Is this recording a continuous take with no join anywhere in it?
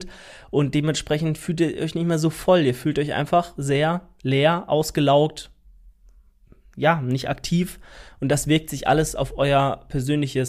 yes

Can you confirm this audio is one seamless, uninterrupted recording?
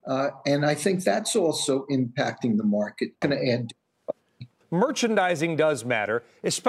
no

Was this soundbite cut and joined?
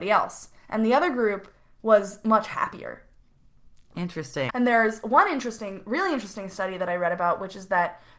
yes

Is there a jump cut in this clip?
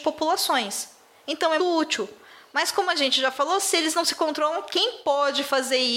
yes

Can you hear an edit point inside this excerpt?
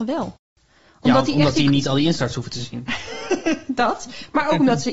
no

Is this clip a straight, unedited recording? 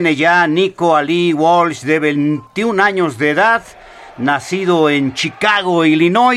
yes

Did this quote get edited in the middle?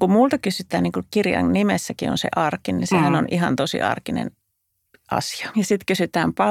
yes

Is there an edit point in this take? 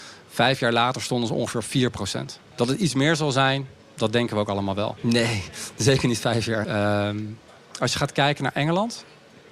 yes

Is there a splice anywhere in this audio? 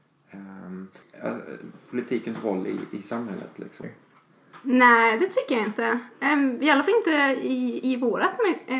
yes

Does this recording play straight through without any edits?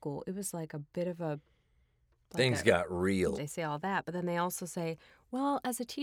no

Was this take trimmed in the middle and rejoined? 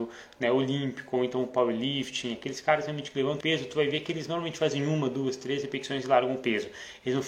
yes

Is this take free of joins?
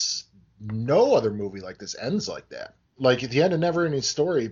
no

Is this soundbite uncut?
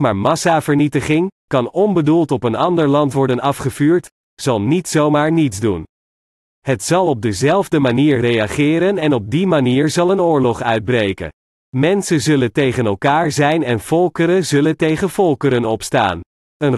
no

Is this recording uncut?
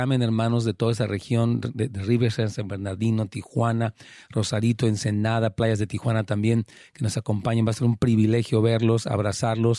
yes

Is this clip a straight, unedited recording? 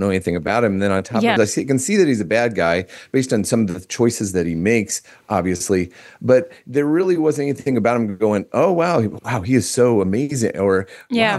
no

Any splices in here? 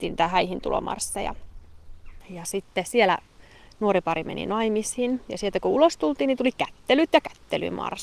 yes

